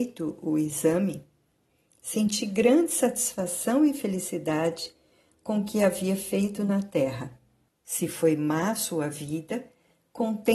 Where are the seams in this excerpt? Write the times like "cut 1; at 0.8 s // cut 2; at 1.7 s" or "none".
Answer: cut 1; at 7.7 s